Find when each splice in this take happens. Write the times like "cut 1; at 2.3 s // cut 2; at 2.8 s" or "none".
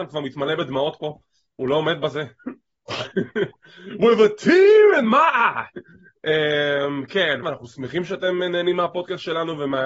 cut 1; at 7.4 s